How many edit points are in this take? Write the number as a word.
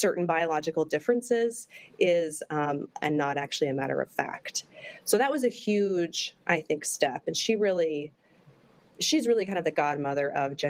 one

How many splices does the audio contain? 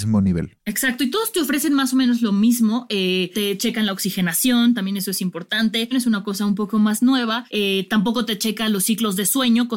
two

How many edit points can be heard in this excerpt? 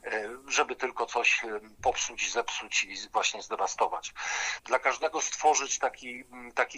one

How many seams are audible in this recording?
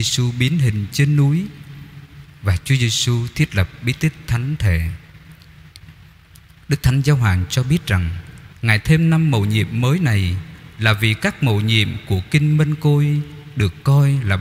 one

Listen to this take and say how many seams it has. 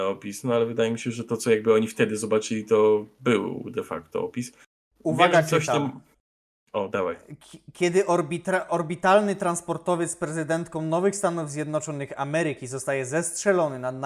one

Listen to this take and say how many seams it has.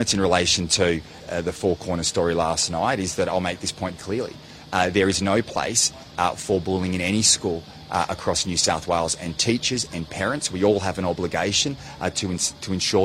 two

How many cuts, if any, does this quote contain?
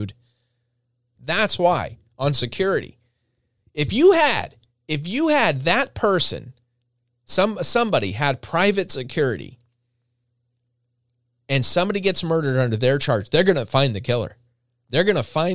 one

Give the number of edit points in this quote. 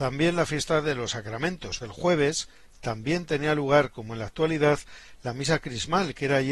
one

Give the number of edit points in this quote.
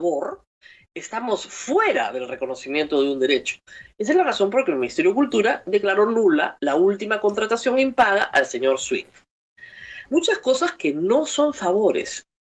one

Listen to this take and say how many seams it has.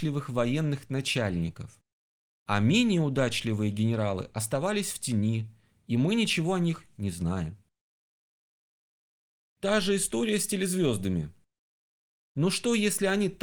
one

